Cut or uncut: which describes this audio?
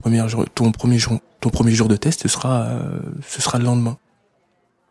uncut